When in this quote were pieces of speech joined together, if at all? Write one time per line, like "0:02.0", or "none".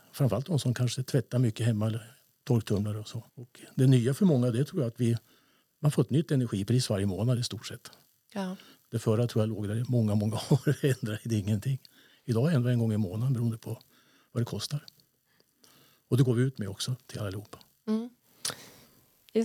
0:03.3